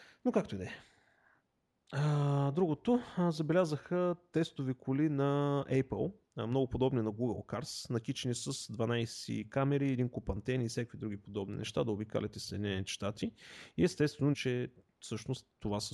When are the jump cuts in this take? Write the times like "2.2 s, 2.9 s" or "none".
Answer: 14.3 s